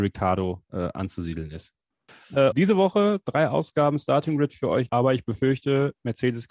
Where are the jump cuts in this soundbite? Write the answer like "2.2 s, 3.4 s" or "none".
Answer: 2.5 s, 4.9 s

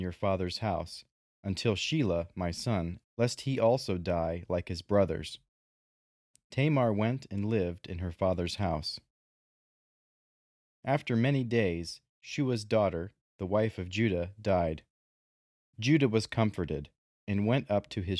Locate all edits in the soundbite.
3.0 s

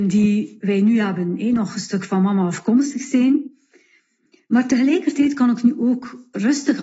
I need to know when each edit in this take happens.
none

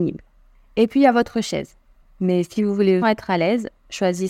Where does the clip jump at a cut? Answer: 2.0 s, 3.0 s

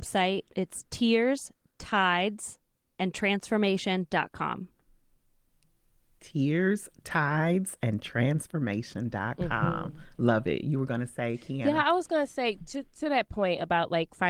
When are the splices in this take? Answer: none

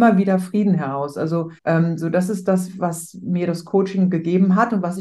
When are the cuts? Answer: 1.6 s

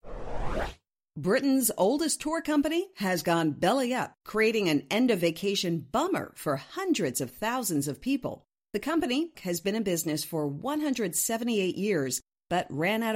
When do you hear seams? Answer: 9.3 s

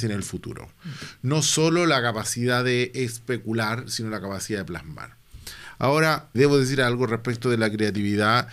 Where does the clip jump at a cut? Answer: 6.3 s

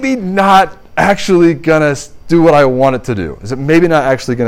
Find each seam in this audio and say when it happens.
none

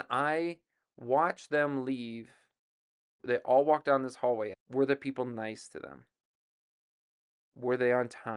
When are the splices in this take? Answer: 3.2 s, 4.5 s

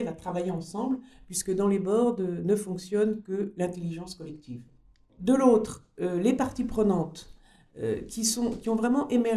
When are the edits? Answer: none

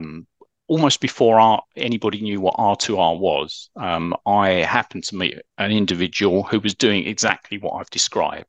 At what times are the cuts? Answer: none

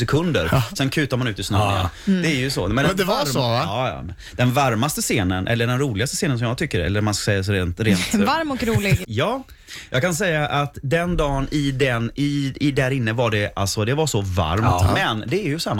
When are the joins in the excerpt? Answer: 9.0 s

